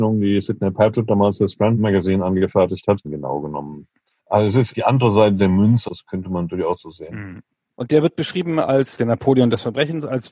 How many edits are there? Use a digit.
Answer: 2